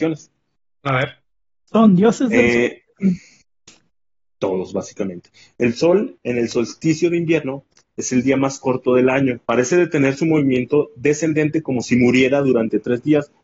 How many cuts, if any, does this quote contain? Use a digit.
1